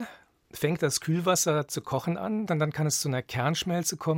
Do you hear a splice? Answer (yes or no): yes